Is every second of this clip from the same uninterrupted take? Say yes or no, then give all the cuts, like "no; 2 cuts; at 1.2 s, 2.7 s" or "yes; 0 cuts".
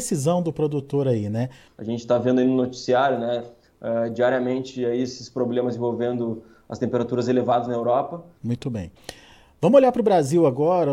no; 2 cuts; at 1.7 s, 8.4 s